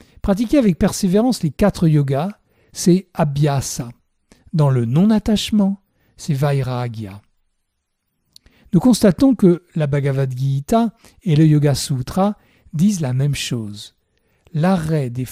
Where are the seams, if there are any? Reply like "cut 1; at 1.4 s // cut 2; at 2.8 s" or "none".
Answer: none